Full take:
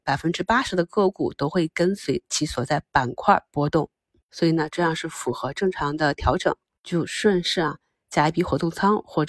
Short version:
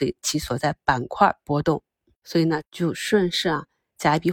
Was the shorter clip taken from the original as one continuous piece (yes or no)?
no